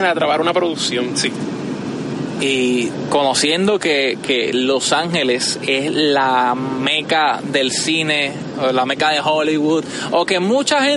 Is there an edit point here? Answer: no; 0 cuts

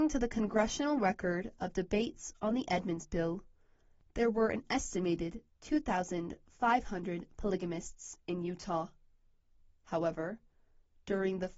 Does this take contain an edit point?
no; 0 cuts

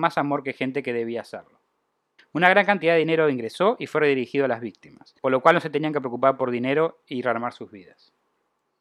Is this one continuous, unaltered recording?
no; 2 cuts; at 2.2 s, 5.2 s

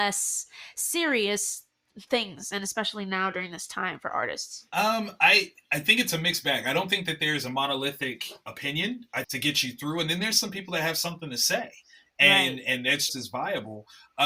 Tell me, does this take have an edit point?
yes; 2 cuts; at 9.2 s, 13.1 s

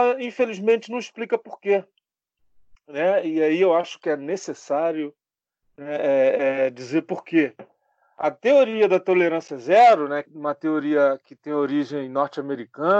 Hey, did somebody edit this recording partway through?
no; 0 cuts

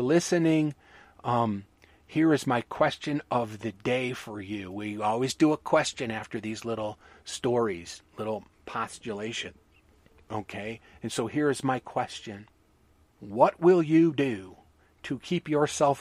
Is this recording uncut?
yes; 0 cuts

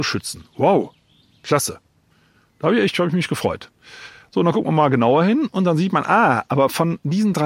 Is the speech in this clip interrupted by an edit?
no; 0 cuts

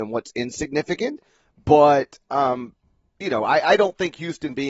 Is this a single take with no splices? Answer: yes; 0 cuts

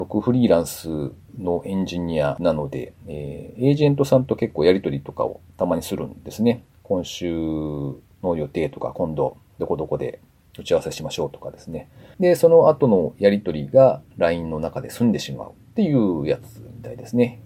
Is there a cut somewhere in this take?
yes; 1 cut; at 12.1 s

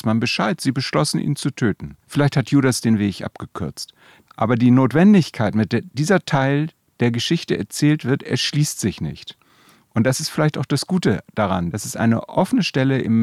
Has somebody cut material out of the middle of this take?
yes; 2 cuts; at 2.0 s, 4.3 s

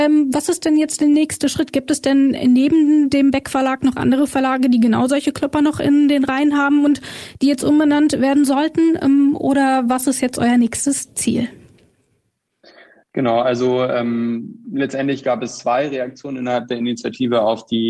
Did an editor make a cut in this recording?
no; 0 cuts

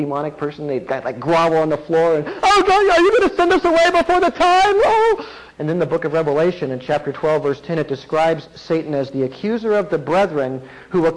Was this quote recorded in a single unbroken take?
no; 1 cut; at 5.5 s

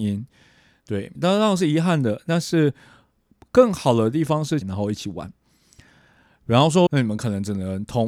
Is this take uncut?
no; 3 cuts; at 1.2 s, 4.6 s, 6.9 s

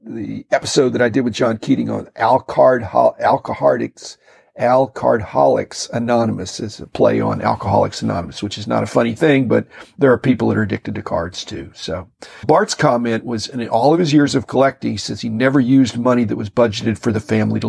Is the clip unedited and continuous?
yes; 0 cuts

